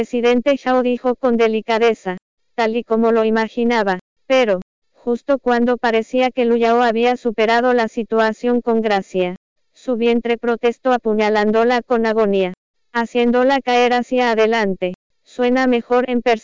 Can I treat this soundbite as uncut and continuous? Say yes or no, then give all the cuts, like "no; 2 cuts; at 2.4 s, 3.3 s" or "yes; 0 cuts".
no; 2 cuts; at 4.2 s, 15.1 s